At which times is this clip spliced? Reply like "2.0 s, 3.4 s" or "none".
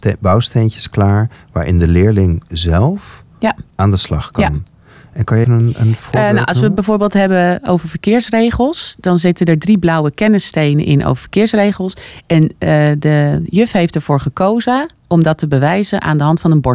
5.4 s